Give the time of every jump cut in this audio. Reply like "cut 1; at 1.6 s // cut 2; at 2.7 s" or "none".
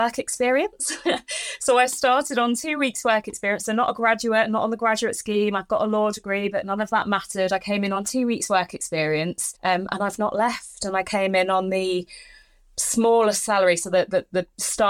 cut 1; at 9.6 s

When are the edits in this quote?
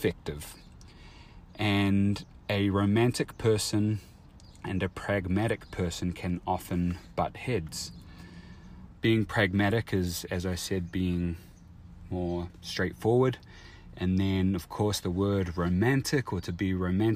cut 1; at 8.9 s

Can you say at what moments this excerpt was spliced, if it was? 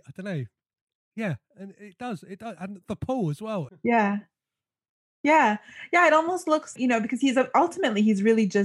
cut 1; at 3.7 s // cut 2; at 6.8 s

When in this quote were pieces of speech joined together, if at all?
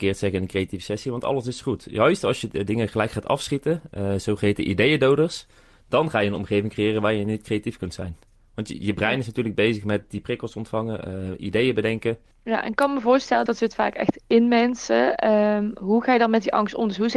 cut 1; at 12.3 s // cut 2; at 13.5 s

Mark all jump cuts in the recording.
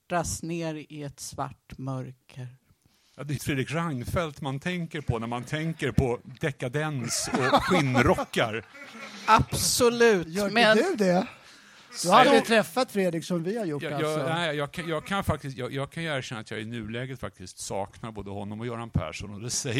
cut 1; at 3.4 s

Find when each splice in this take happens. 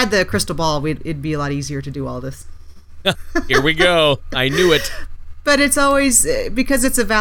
cut 1; at 3.1 s

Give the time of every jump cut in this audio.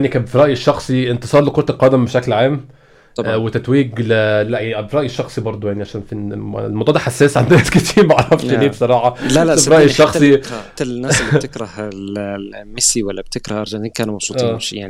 cut 1; at 10.8 s

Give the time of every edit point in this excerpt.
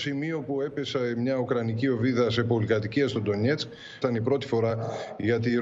cut 1; at 4.0 s

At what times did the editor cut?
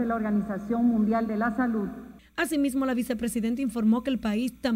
none

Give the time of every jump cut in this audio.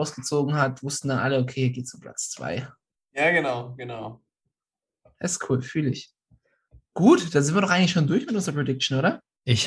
none

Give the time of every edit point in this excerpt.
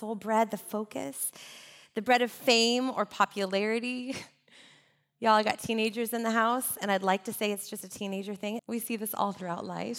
cut 1; at 8.6 s

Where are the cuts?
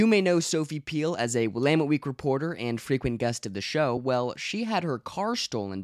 none

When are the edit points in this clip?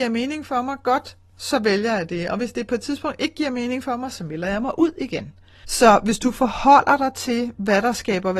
cut 1; at 5.6 s

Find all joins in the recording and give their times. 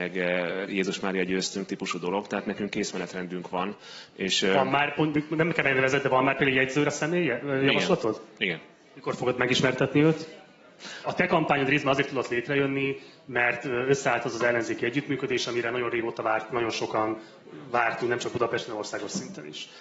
cut 1; at 11.0 s

